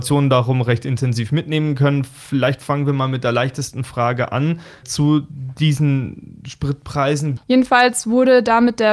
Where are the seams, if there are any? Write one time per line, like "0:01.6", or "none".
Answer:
0:04.8
0:07.4